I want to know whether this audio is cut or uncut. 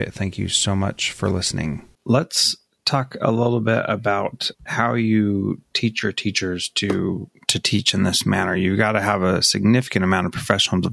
cut